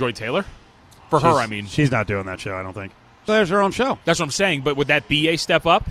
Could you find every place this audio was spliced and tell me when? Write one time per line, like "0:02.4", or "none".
0:03.3